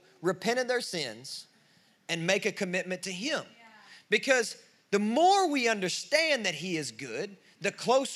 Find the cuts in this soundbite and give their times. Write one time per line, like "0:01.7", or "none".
none